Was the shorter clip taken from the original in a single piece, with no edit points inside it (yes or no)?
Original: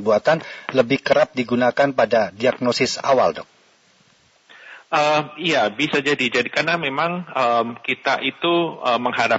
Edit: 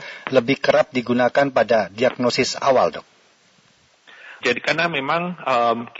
no